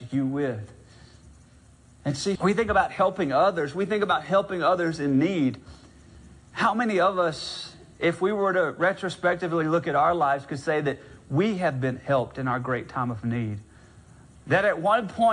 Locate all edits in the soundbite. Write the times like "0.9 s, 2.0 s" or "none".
2.4 s